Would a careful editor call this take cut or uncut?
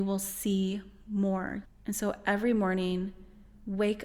cut